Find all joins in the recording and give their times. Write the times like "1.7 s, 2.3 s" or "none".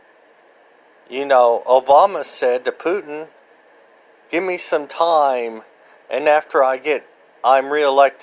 none